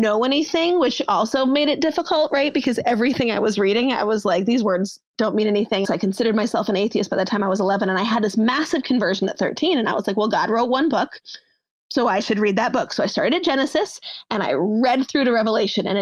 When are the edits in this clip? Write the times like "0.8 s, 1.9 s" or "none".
5.8 s